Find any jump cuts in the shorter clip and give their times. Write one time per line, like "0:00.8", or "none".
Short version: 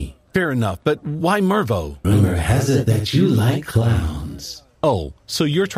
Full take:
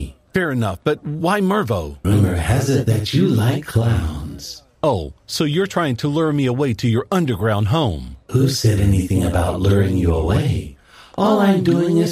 none